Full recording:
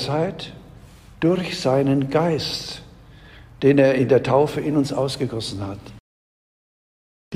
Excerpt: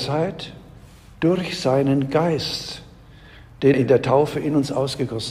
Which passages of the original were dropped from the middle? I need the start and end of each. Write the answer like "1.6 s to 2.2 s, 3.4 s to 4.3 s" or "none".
3.7 s to 3.9 s